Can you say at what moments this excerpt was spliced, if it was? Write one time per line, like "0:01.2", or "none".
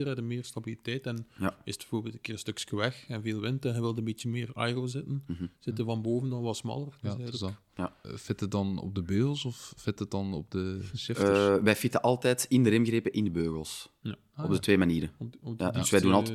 0:08.0